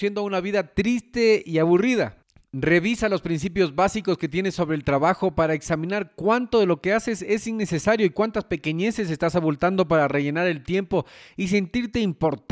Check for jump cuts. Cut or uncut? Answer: uncut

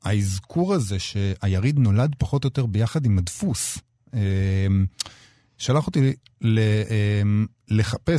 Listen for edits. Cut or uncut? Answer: uncut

